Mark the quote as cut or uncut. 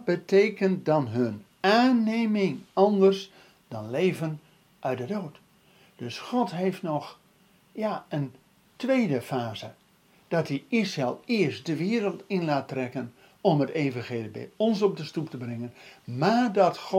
uncut